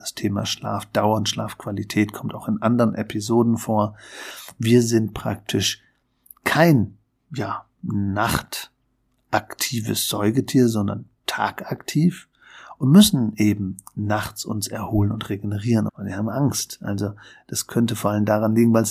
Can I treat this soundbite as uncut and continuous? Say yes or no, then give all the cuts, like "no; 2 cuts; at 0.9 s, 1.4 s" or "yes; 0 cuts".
no; 1 cut; at 15.9 s